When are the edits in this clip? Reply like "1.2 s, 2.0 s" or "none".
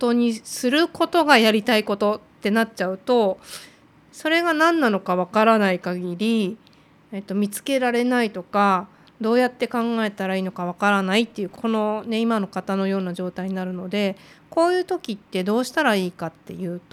none